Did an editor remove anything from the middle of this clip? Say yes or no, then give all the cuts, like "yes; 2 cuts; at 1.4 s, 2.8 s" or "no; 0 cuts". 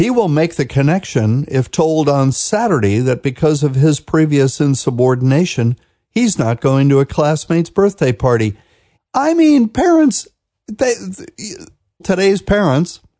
yes; 2 cuts; at 8.9 s, 12.0 s